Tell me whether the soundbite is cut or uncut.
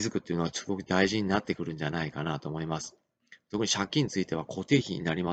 uncut